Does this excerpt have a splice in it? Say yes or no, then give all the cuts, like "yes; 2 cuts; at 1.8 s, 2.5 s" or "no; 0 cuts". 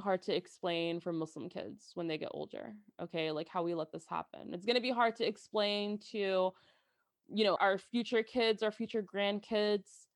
yes; 1 cut; at 7.6 s